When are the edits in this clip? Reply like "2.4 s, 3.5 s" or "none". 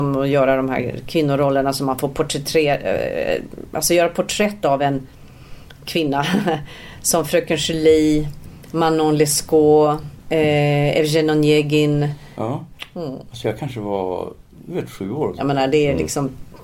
10.2 s, 12.3 s, 15.4 s